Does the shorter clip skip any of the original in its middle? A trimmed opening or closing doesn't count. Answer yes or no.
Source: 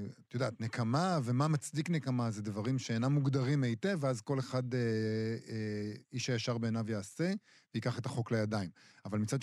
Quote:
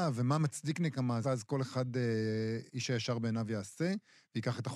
yes